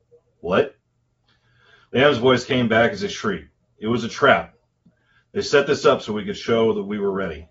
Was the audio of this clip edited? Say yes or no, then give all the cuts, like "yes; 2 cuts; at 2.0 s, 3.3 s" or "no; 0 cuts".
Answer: no; 0 cuts